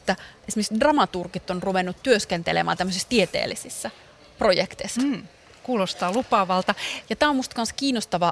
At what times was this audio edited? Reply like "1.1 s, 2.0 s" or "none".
5.0 s, 7.0 s